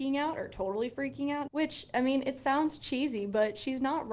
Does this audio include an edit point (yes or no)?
yes